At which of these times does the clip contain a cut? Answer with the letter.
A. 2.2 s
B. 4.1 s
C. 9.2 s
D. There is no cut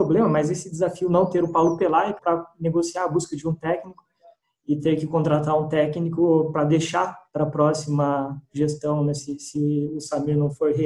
A